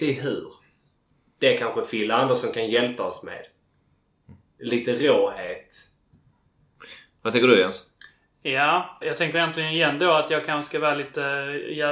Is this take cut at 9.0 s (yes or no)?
yes